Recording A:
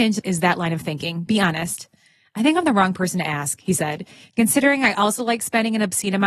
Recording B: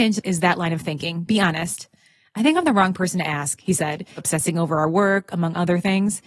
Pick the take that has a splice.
B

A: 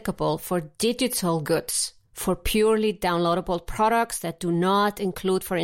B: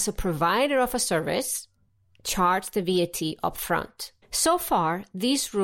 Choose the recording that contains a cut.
B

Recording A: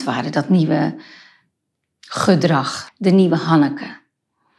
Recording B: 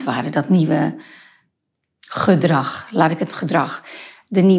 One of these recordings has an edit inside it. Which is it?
A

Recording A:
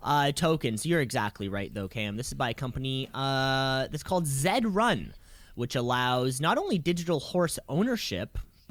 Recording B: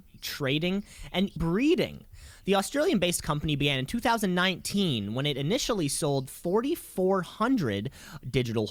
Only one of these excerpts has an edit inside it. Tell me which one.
B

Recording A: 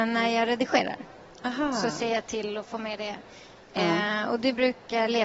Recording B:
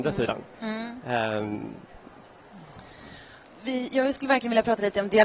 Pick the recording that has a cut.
B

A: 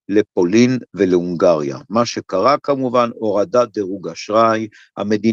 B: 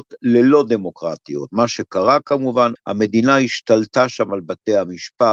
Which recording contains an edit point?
B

